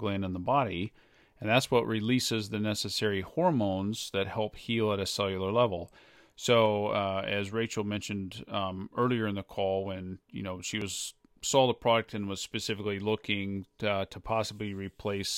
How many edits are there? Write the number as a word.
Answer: zero